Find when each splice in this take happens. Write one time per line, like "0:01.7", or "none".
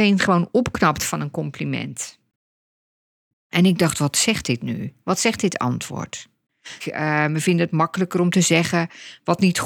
0:06.8